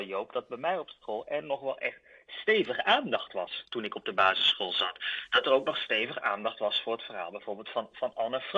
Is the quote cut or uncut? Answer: uncut